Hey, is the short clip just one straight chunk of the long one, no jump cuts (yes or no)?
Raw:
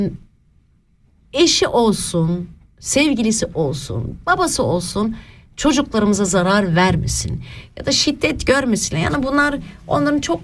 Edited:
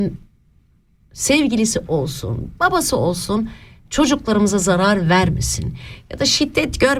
no